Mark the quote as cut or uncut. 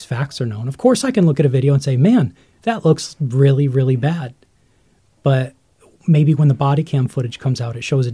uncut